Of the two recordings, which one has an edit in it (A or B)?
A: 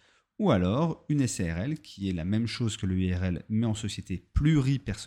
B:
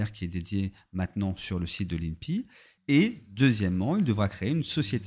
B